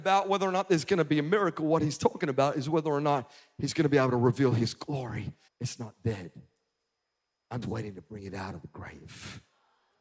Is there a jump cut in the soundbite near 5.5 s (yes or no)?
yes